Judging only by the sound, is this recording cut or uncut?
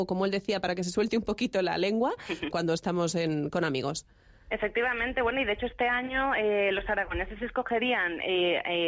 cut